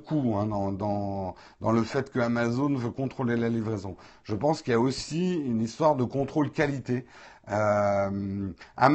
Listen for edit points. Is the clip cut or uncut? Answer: uncut